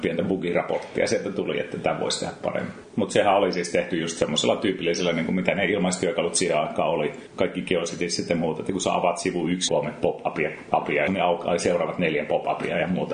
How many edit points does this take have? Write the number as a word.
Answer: two